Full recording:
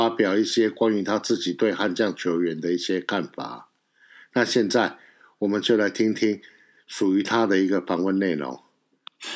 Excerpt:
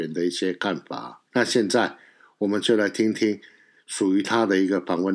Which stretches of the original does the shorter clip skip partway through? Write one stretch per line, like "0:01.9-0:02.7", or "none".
0:03.7-0:04.3